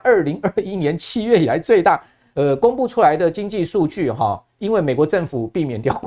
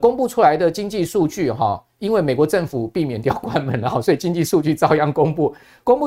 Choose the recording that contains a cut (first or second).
first